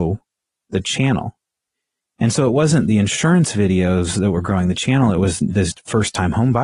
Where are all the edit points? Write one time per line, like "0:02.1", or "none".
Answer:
0:05.4